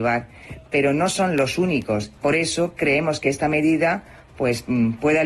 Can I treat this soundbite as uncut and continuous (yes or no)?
no